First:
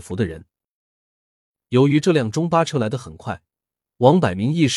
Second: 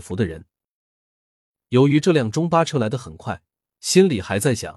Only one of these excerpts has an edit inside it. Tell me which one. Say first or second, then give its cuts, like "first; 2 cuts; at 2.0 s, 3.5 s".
second; 1 cut; at 3.6 s